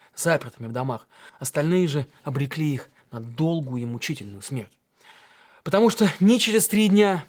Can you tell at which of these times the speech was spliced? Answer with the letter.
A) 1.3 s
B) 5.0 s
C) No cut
A